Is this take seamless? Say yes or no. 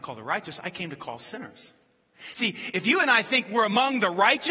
yes